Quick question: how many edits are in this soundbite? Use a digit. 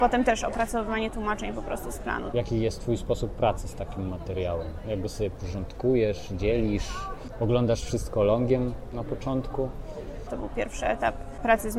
2